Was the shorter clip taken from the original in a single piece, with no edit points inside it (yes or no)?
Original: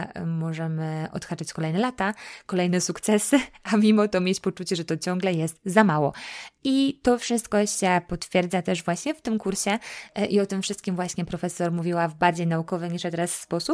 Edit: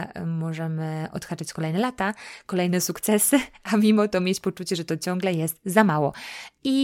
yes